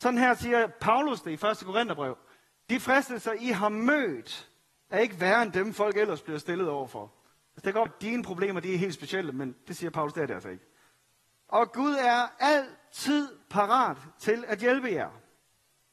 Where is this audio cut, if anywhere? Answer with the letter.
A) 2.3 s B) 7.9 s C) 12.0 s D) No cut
B